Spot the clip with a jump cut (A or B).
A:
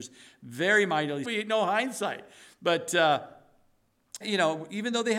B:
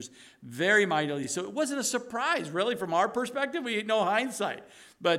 A